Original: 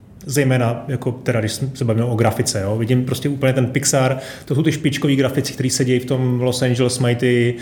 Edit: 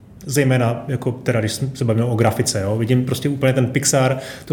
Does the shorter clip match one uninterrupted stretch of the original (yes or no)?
yes